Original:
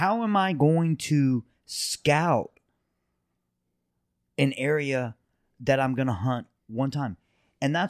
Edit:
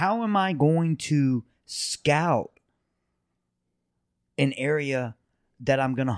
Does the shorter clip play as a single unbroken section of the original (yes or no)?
yes